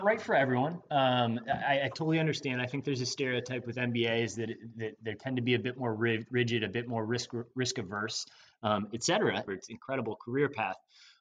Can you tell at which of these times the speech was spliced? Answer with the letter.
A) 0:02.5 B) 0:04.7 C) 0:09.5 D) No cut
C